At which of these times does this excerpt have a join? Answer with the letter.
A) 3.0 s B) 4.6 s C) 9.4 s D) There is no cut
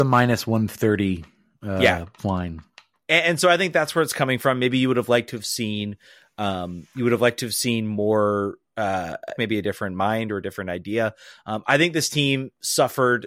C